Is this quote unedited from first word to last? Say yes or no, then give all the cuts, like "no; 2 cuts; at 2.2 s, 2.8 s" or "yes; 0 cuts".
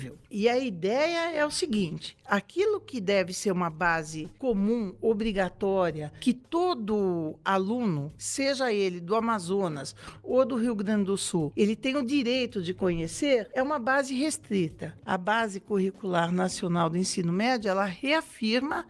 no; 1 cut; at 15.0 s